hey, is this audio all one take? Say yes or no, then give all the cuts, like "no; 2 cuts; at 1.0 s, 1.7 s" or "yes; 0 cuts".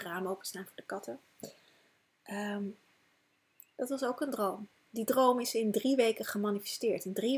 yes; 0 cuts